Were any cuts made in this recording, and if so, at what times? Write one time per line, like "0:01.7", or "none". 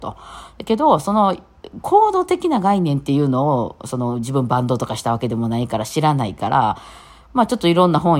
none

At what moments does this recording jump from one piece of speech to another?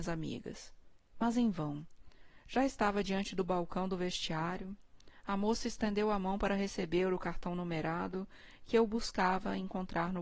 none

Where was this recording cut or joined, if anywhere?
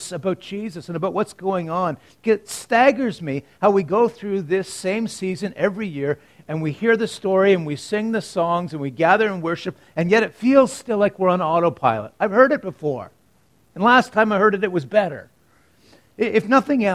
none

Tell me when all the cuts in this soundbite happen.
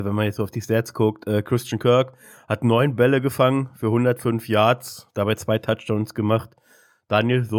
none

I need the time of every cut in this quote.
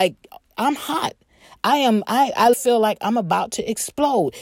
0:02.5

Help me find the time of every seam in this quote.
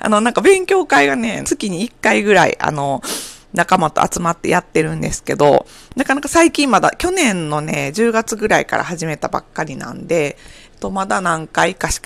0:01.4

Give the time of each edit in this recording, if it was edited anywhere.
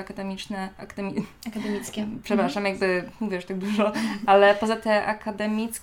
none

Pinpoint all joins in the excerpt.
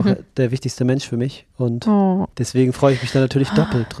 0:02.3

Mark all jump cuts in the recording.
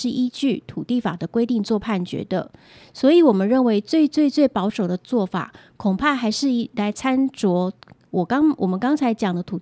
none

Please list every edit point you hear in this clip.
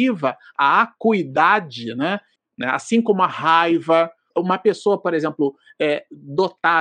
0:02.4
0:04.3

